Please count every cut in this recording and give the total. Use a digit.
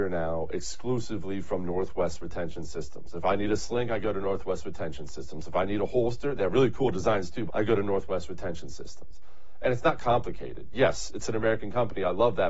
1